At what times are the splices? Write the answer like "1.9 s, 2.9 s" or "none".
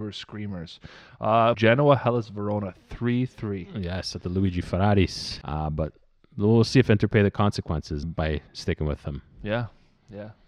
1.5 s, 5.4 s, 8.0 s